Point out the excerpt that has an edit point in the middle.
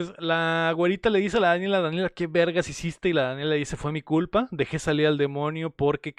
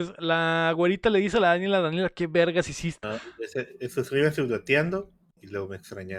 second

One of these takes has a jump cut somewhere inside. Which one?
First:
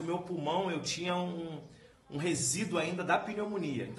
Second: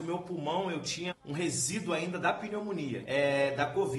second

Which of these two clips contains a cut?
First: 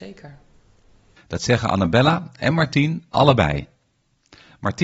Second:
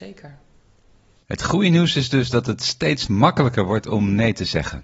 first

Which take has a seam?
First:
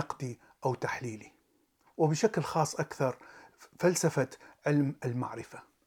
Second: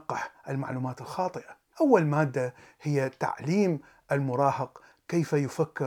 second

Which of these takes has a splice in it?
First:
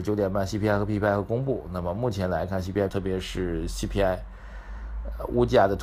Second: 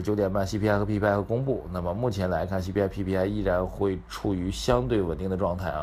first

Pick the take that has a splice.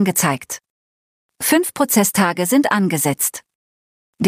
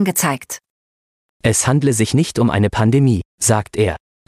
second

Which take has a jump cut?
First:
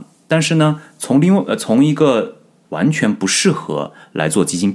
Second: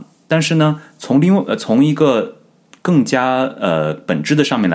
first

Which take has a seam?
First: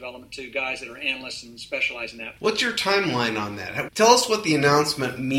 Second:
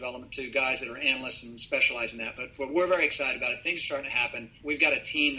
first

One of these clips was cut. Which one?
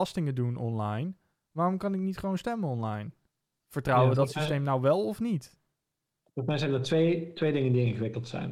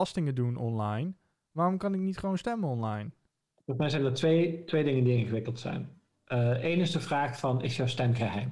second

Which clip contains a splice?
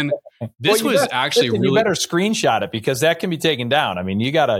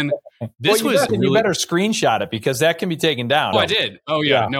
second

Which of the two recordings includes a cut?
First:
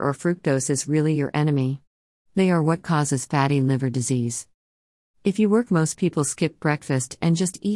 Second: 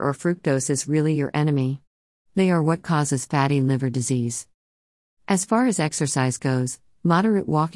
first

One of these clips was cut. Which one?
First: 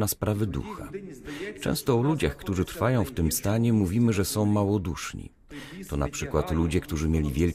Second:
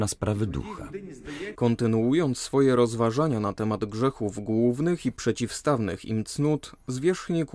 second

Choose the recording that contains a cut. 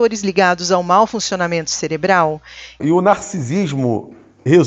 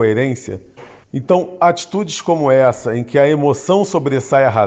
first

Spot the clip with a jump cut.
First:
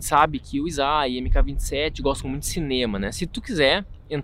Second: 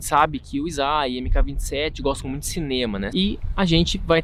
second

